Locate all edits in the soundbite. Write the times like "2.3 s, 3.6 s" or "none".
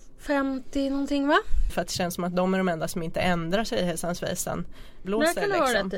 1.7 s, 5.0 s